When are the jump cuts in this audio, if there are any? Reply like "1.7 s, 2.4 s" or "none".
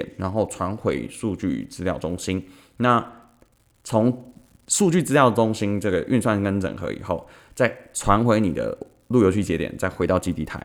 none